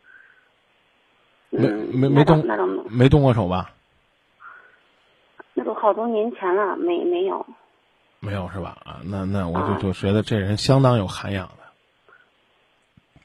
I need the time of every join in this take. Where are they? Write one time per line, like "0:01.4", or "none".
none